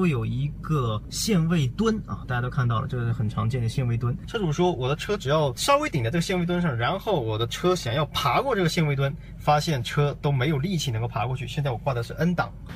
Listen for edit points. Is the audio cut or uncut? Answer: uncut